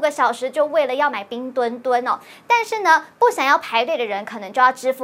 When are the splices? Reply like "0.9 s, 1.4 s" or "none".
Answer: none